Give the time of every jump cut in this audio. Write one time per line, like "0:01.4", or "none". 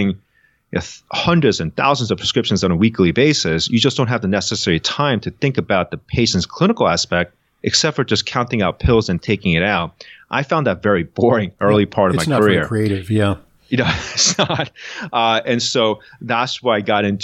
none